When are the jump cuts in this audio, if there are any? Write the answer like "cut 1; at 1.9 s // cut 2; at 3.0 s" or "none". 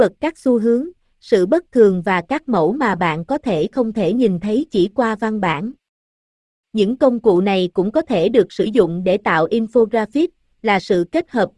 none